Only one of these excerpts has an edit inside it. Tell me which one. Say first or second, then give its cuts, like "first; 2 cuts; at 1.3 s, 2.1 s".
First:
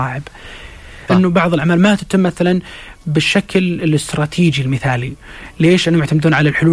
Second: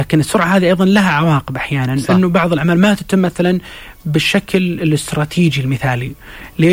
first; 1 cut; at 1.1 s